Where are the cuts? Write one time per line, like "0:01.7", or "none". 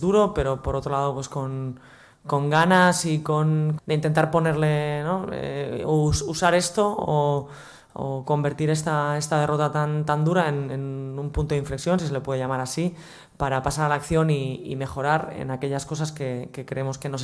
0:03.8